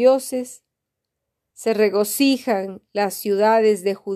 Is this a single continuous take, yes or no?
no